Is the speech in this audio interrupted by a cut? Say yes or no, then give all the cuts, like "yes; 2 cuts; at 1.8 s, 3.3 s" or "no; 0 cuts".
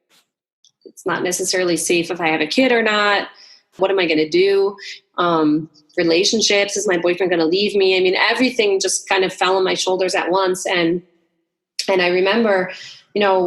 yes; 1 cut; at 3.8 s